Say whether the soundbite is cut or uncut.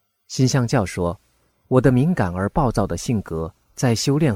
uncut